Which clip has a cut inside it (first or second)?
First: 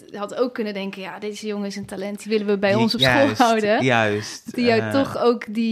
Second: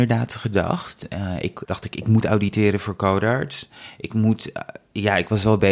second